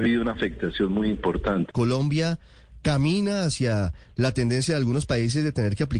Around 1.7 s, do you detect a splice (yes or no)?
yes